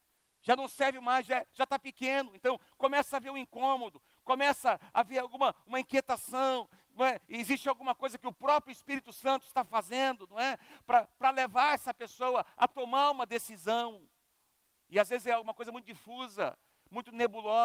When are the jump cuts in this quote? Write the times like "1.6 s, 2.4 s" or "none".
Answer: none